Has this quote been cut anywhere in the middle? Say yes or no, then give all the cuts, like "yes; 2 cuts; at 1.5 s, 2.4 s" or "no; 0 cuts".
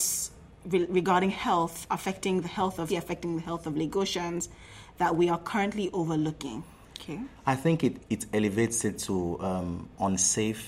yes; 3 cuts; at 2.9 s, 6.8 s, 8.0 s